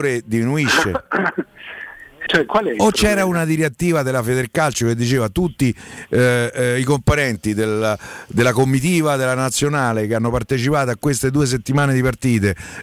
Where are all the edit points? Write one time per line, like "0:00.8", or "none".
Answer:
0:02.3

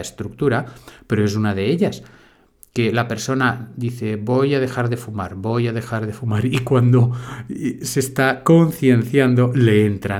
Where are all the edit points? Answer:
none

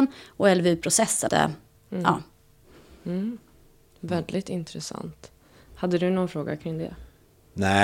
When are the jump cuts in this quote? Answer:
0:01.3

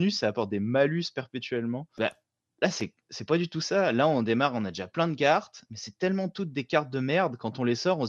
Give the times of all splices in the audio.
0:02.0

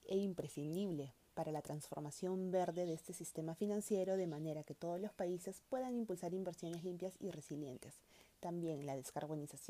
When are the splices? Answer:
none

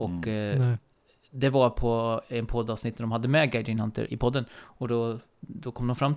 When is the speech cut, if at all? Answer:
0:04.1

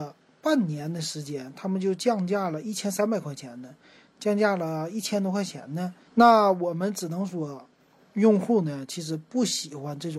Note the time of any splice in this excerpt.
0:06.1

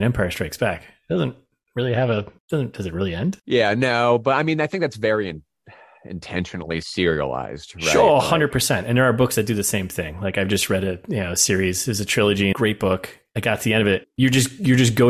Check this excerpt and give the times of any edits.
0:12.5
0:14.0

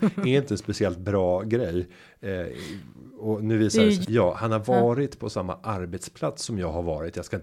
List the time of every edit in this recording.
0:04.0

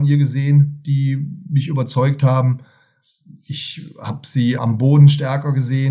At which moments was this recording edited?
0:04.6

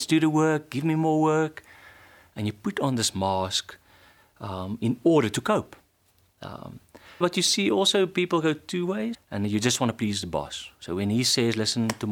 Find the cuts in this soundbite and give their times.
0:07.2
0:09.1

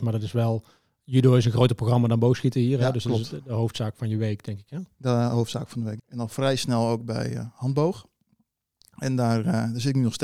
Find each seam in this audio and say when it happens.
0:06.0

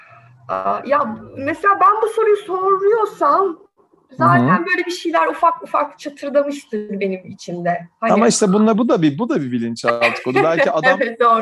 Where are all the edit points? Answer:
none

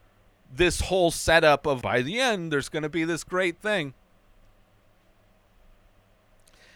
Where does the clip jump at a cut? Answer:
0:01.8

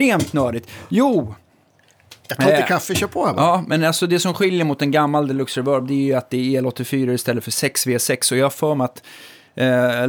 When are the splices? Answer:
none

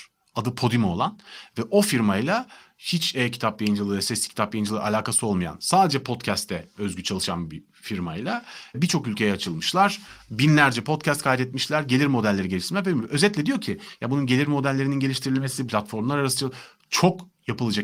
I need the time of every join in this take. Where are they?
0:15.7

